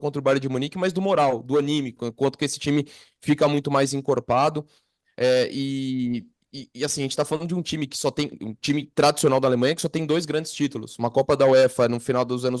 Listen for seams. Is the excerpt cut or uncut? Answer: cut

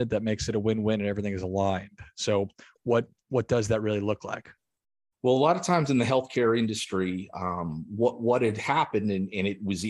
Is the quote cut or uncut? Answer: uncut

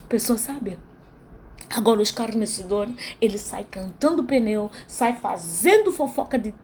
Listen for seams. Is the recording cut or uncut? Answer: uncut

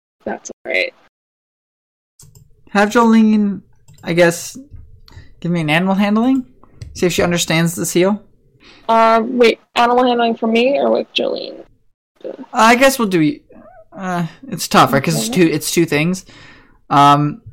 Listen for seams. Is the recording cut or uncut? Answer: uncut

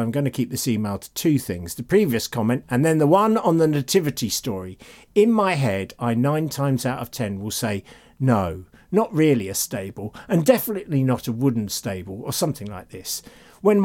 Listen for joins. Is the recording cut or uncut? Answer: uncut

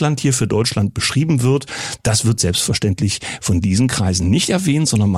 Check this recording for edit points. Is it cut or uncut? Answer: uncut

